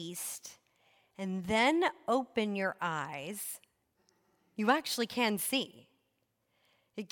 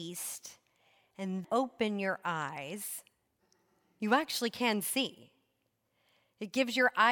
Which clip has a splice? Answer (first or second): second